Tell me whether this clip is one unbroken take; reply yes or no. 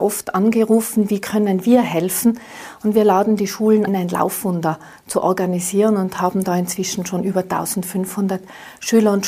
no